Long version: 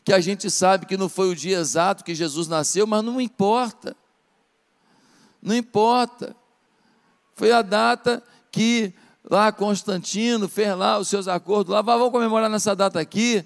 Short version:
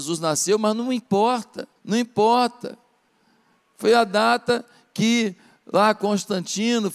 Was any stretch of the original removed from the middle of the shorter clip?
yes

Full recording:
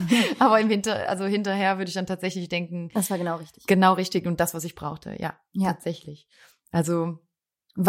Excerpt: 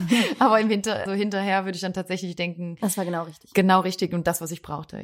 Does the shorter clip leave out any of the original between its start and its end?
yes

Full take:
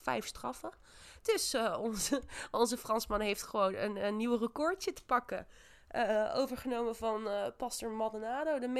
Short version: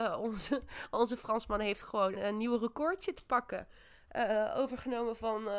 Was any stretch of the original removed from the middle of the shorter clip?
yes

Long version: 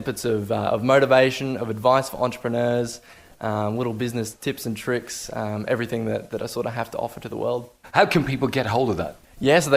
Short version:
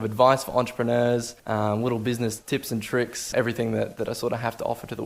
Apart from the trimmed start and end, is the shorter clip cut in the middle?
yes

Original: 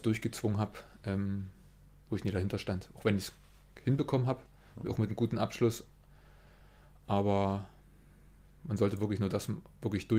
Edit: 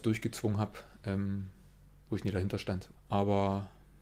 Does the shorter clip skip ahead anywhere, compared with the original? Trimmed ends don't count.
yes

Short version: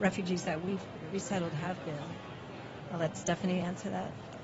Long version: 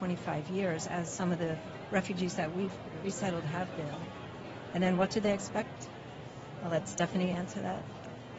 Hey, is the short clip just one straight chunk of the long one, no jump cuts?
no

